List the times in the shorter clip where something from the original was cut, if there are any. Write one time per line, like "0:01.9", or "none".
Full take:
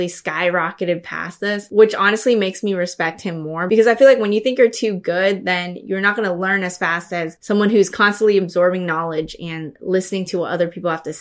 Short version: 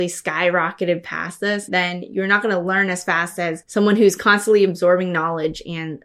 0:01.7